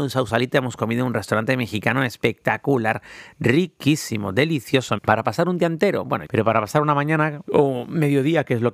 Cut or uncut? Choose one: cut